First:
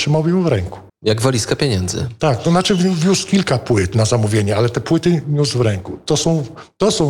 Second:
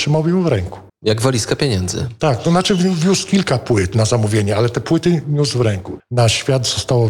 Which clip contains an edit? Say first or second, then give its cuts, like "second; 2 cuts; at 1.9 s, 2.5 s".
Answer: second; 1 cut; at 6.0 s